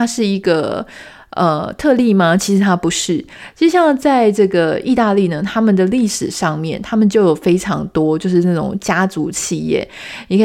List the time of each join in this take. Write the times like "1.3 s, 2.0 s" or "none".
none